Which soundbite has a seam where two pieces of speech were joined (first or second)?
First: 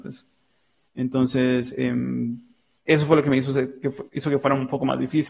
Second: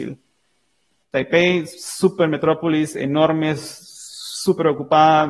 second